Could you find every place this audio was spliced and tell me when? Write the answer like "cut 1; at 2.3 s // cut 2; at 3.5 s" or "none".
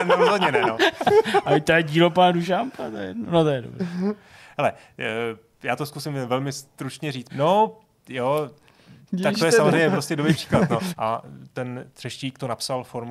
cut 1; at 7.3 s // cut 2; at 10.9 s